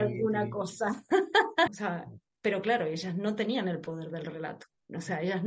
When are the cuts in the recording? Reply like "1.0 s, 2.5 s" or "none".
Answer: 1.7 s